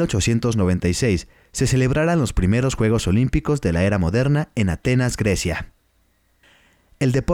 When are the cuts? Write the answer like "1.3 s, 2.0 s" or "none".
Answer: none